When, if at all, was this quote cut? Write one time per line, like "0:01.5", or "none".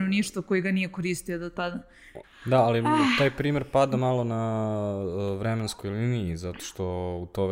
0:02.2